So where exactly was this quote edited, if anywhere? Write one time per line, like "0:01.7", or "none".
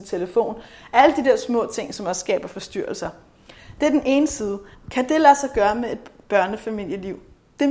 0:04.7